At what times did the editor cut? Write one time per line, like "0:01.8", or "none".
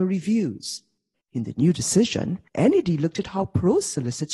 0:01.2
0:02.5

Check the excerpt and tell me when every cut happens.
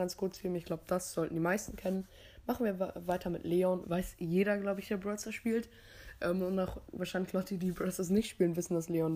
0:03.8

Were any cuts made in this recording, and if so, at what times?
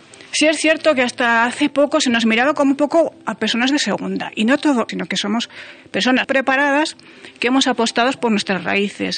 0:04.9
0:06.2

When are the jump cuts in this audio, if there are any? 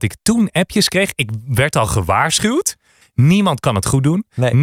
0:03.0

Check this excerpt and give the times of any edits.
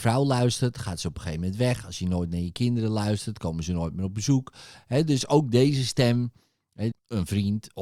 0:04.7
0:06.9

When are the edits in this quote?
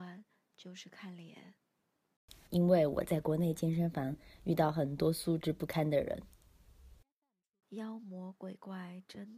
0:02.5

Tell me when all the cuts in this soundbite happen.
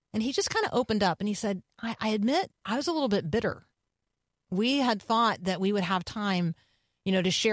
0:02.6

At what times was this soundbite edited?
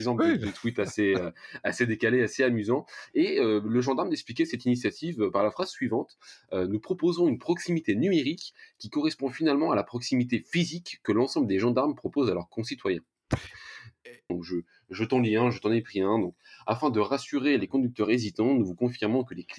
0:14.3

